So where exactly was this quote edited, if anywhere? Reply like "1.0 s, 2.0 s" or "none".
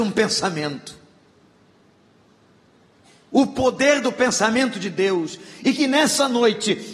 none